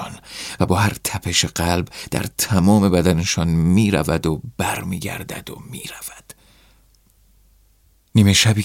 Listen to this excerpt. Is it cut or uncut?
uncut